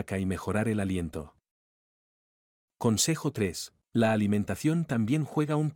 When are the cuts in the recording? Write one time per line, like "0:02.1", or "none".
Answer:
0:03.8